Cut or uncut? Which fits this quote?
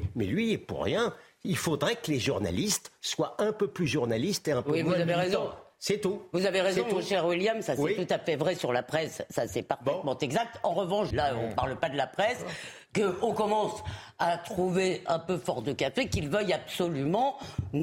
cut